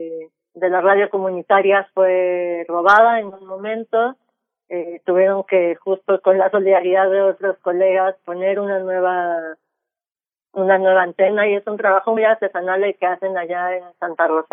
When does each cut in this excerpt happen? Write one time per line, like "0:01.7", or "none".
0:12.2